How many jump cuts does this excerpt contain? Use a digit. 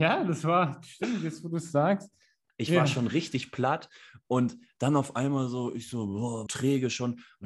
2